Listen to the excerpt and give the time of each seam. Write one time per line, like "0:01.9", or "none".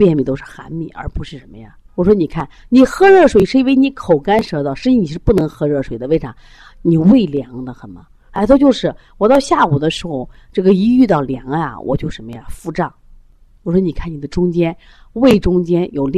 0:01.9